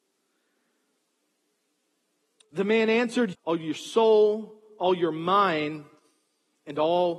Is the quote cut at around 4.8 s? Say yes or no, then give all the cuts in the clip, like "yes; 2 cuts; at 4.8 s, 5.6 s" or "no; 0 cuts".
no; 1 cut; at 3.3 s